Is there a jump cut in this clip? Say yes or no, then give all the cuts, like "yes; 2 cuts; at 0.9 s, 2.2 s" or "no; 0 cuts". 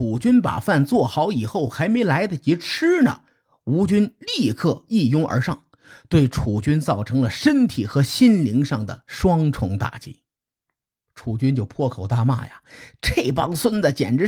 no; 0 cuts